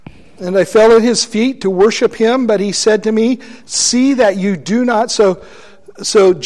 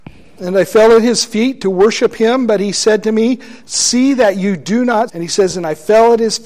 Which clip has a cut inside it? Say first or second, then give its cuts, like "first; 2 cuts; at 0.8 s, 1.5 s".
second; 1 cut; at 5.1 s